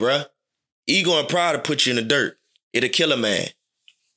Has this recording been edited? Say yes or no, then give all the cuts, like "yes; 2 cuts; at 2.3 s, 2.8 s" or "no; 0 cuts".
no; 0 cuts